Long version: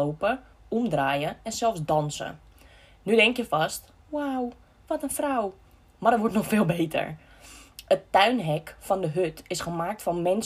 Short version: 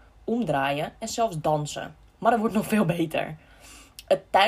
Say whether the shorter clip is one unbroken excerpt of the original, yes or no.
no